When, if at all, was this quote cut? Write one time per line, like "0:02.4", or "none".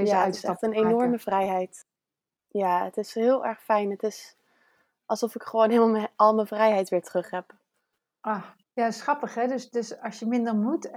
0:02.4
0:08.6

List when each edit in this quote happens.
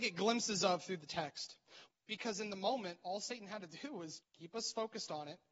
0:01.9
0:04.2

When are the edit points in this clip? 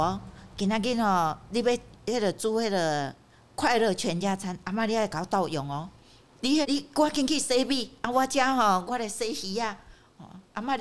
0:06.6
0:08.9

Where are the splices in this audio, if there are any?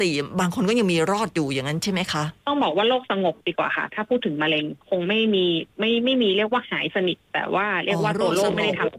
0:02.4

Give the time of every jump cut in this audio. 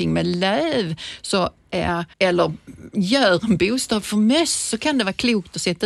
0:02.1

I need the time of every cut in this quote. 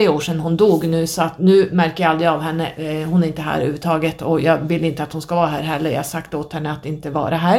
none

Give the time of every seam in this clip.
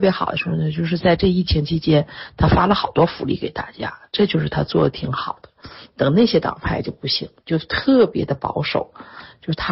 none

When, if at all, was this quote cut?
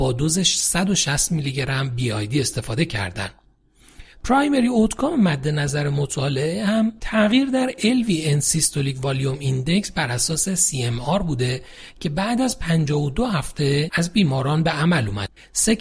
none

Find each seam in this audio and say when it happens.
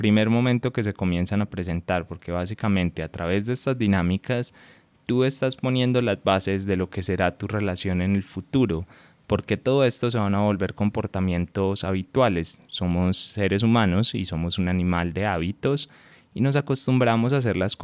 none

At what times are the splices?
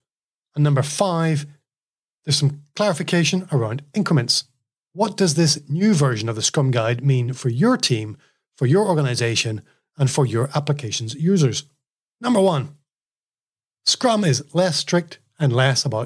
0:04.9
0:12.0

